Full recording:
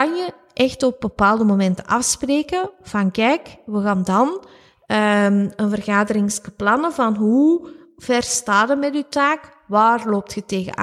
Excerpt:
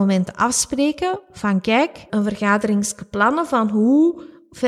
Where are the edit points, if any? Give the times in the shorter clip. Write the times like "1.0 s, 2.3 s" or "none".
2.1 s

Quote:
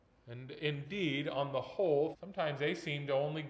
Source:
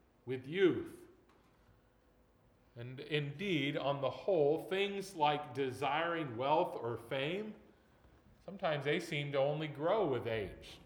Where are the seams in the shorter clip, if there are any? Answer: 2.1 s

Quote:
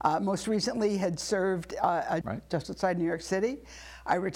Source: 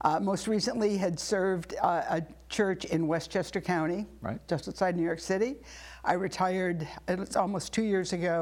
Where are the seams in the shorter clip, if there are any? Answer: 2.2 s

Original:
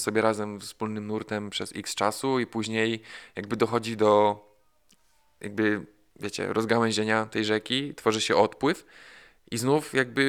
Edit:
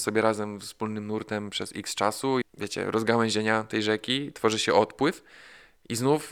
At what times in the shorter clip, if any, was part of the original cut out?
2.4 s

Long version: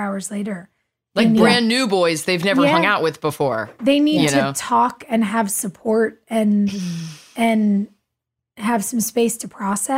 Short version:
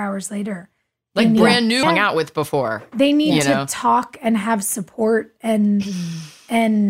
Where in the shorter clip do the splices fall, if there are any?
1.8 s

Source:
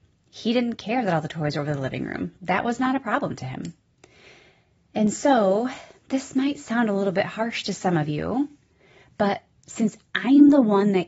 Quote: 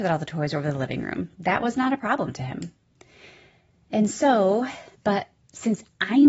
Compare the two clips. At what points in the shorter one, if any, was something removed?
5.0 s

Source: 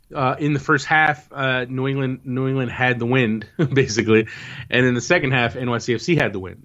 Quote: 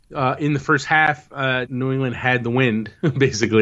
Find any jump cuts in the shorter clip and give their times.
1.7 s

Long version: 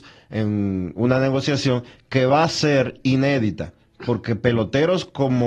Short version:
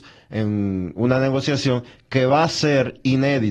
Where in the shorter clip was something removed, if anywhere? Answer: none

